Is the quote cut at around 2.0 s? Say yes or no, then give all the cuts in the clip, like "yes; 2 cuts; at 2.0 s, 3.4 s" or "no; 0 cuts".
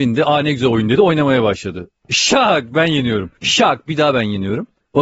no; 1 cut; at 3.4 s